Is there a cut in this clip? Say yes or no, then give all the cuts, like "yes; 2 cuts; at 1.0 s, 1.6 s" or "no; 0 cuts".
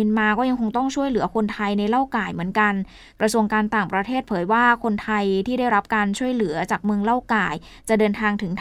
no; 0 cuts